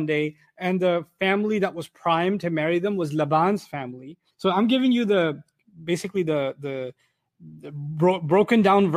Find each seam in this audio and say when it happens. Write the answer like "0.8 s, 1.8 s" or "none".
4.3 s